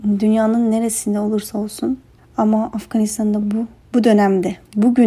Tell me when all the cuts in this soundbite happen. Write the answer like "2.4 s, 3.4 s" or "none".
none